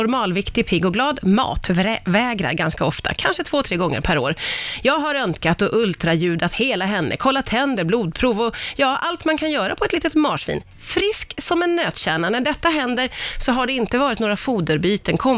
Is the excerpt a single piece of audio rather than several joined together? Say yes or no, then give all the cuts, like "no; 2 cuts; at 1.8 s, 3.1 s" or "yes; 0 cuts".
yes; 0 cuts